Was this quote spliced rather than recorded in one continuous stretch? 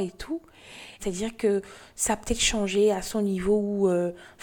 yes; 1 cut; at 1.0 s

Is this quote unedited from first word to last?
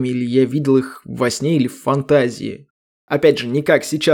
no; 1 cut; at 3.0 s

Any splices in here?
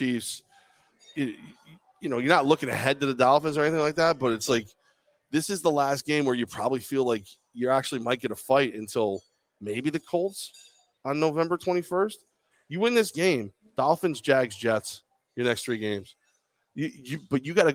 no; 0 cuts

